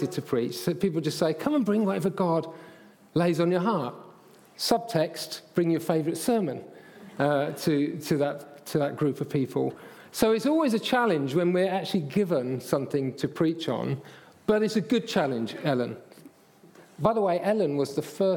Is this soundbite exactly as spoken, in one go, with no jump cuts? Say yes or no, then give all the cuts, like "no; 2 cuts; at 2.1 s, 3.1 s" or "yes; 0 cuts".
yes; 0 cuts